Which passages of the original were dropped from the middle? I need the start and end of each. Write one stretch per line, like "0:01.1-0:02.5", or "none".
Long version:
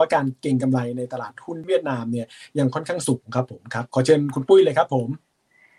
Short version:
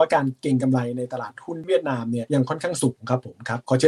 0:02.3-0:02.5